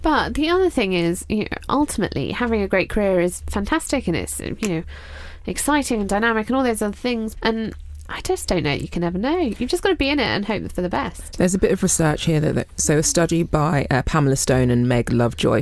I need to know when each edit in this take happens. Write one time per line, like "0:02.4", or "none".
0:07.3